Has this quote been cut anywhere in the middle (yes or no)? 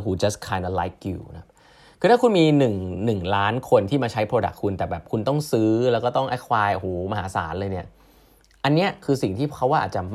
no